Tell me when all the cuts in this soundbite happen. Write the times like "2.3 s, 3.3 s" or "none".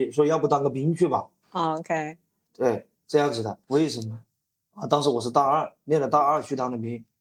3.6 s